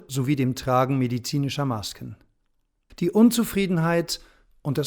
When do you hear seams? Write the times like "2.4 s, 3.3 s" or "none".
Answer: 2.9 s